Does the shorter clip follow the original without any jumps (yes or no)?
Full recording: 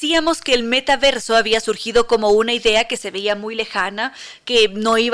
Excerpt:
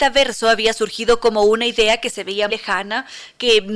no